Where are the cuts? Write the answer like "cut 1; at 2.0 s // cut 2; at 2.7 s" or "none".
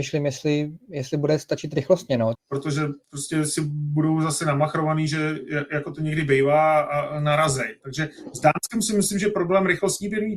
cut 1; at 2.3 s // cut 2; at 7.8 s